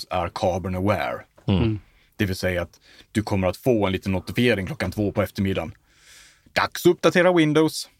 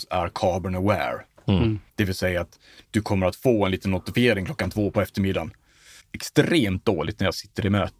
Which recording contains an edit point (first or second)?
second